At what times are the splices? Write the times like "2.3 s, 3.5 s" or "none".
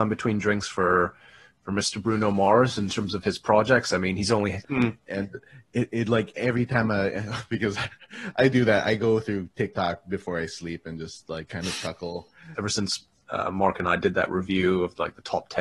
4.6 s, 12.5 s